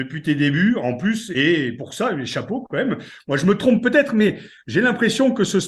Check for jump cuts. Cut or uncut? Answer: uncut